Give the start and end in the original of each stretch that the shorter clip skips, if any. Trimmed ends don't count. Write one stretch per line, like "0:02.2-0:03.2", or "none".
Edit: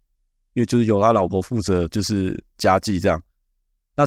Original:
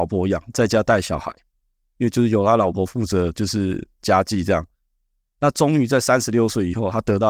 none

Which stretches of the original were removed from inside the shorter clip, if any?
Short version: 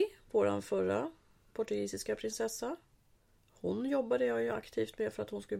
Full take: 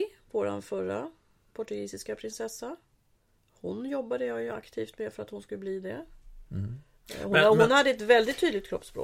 none

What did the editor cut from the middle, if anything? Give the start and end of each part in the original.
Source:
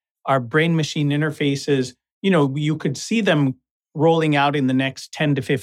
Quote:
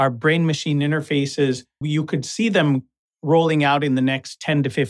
0:02.1-0:02.5

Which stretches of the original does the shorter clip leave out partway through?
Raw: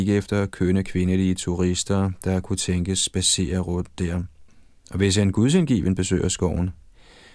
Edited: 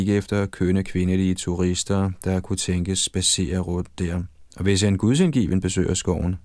0:04.5-0:04.8

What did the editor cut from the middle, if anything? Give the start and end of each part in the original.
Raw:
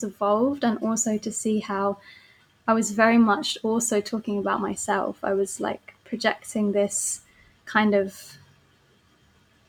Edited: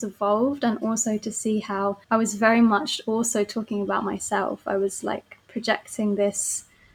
0:02.0-0:02.6

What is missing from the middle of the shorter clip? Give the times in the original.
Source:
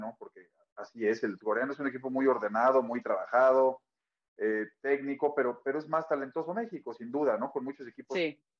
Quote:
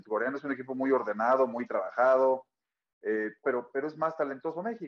0:04.8-0:05.3

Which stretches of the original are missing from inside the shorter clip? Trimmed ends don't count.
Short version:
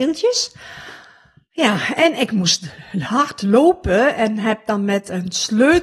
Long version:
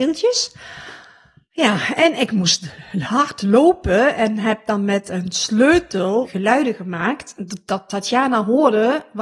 none

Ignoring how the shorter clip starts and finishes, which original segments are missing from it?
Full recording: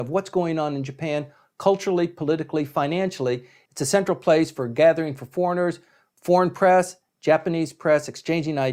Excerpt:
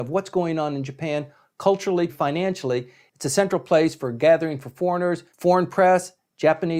0:02.1-0:02.6
0:05.9-0:06.1

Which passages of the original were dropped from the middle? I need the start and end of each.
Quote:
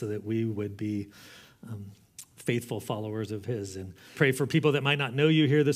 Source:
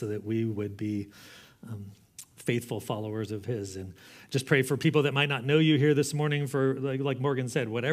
0:04.1-0:04.4

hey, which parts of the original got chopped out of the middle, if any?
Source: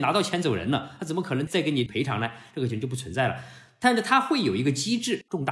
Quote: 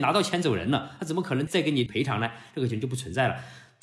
none

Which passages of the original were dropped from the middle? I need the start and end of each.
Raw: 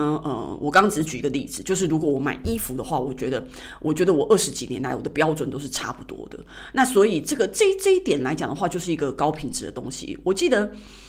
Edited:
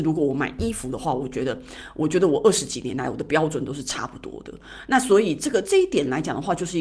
0:07.5-0:07.8

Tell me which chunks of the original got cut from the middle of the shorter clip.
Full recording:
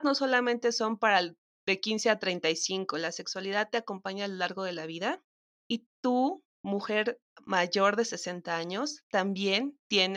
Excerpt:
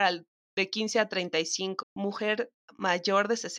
0:02.9-0:06.5

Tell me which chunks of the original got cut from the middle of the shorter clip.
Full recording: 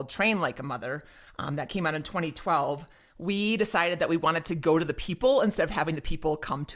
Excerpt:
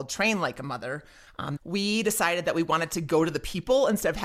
0:01.6-0:03.1

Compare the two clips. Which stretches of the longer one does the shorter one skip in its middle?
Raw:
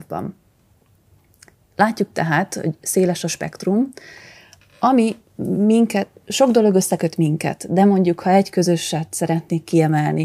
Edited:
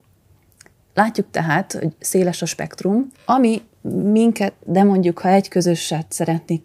0:04.0-0:04.7
0:06.2-0:07.7

